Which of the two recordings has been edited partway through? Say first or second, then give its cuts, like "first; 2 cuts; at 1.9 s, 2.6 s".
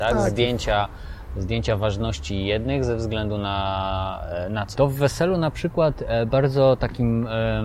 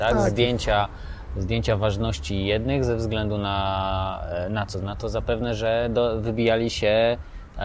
first; 1 cut; at 4.7 s